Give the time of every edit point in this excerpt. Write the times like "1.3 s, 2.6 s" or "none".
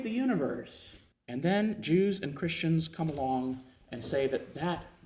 1.1 s